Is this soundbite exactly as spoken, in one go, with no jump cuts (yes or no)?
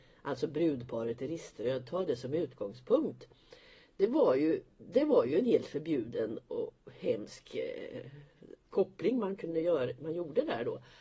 no